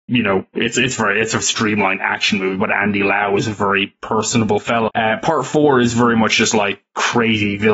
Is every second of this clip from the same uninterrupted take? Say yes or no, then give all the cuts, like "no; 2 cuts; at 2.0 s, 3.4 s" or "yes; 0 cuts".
no; 2 cuts; at 1.4 s, 4.9 s